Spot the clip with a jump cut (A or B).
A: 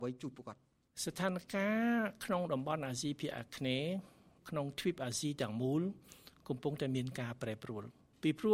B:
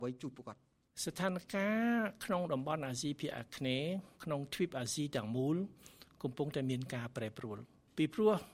B